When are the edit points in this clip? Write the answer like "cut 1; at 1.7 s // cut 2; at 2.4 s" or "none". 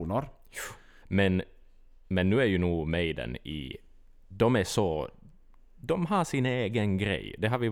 cut 1; at 1.0 s